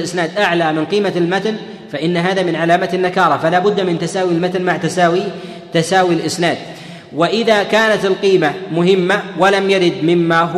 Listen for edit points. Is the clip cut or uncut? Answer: uncut